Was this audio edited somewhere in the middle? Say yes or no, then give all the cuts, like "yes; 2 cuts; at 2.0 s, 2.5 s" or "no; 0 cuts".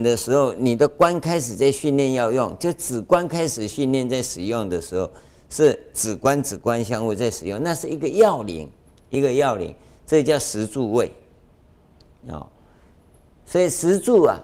no; 0 cuts